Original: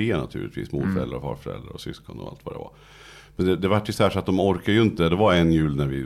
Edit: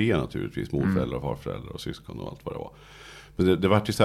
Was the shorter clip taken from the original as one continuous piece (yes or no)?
yes